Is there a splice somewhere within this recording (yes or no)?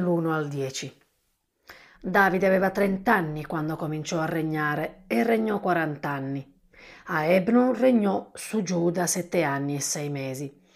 yes